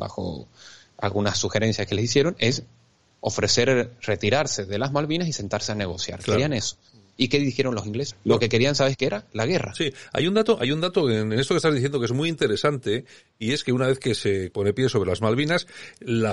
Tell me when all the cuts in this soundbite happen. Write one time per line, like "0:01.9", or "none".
0:08.1
0:14.5